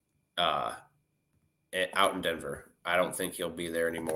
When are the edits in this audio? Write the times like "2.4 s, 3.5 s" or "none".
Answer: none